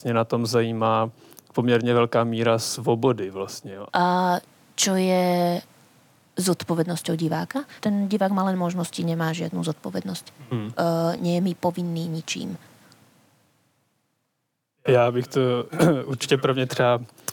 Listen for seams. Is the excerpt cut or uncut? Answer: cut